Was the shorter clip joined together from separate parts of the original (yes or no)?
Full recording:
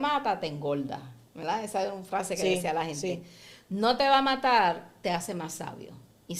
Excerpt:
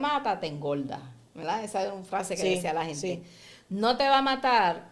no